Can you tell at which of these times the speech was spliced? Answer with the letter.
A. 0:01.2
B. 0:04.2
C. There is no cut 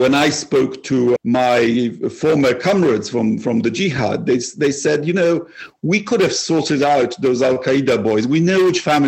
A